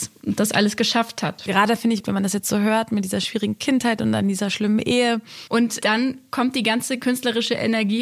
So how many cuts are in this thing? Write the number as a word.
two